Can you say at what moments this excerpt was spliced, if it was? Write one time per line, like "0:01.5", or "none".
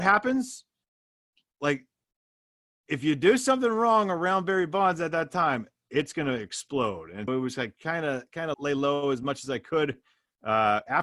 0:07.3
0:08.5